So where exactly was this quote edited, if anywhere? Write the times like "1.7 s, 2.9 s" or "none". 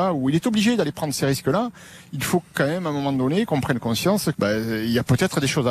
4.3 s

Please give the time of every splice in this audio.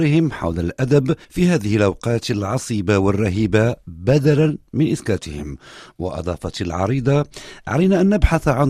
1.2 s

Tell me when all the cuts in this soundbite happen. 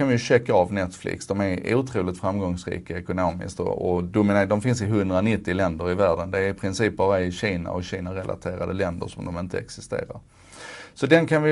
none

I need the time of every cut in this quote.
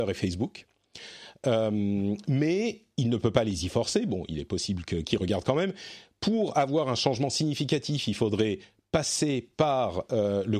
none

